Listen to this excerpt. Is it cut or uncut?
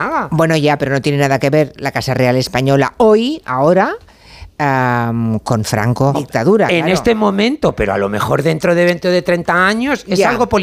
cut